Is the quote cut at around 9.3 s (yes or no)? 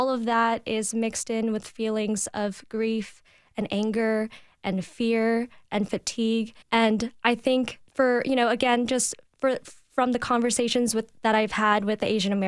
no